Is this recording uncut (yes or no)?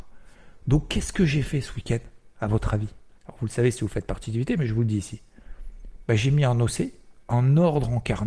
no